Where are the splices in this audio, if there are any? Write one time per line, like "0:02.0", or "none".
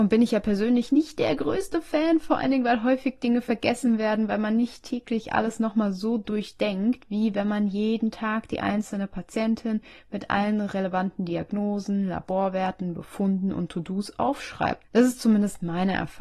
none